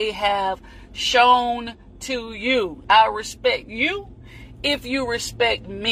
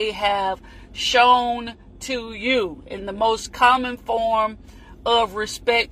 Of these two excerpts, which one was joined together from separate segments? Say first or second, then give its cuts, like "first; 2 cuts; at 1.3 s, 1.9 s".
first; 1 cut; at 2.8 s